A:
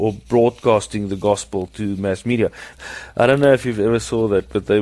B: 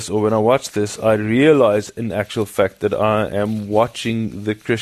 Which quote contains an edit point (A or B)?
A